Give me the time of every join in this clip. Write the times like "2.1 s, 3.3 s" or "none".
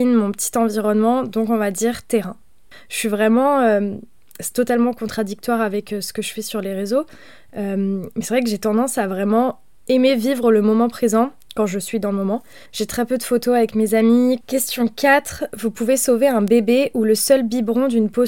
2.7 s, 12.7 s, 14.4 s

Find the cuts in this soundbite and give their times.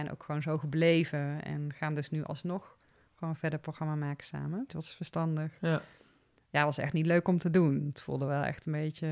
4.7 s

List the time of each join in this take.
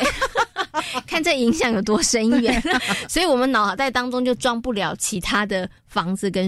2.8 s

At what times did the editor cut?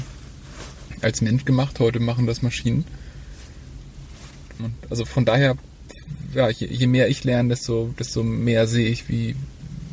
4.6 s

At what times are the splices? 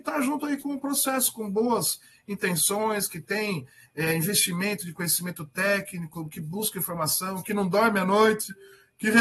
none

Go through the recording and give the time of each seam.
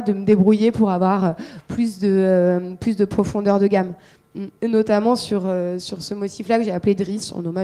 4.6 s

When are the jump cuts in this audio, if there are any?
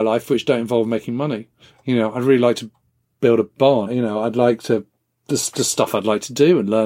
3.8 s

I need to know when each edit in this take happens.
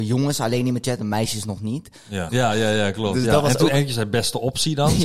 2.3 s

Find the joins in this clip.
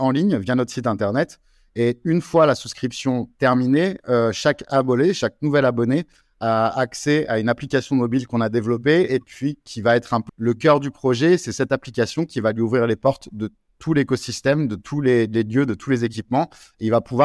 10.3 s

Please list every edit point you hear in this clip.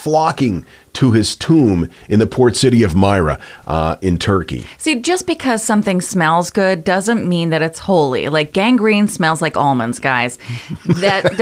none

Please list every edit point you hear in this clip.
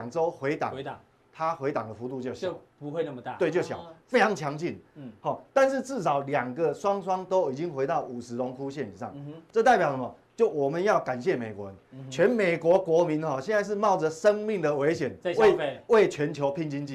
4.0 s

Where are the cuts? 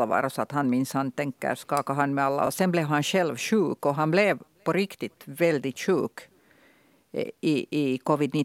none

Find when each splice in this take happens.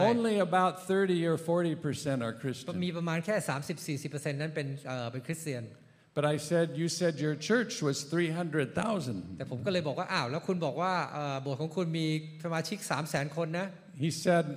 none

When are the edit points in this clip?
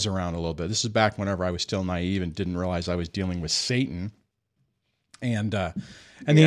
none

